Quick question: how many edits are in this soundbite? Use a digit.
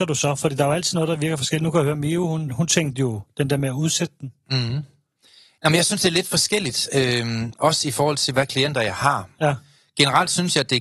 0